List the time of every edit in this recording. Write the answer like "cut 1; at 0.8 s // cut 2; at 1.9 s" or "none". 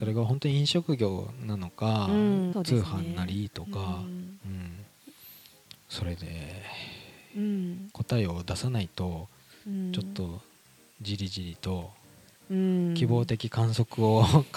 cut 1; at 2.5 s